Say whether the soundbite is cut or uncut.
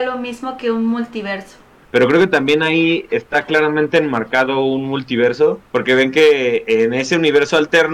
cut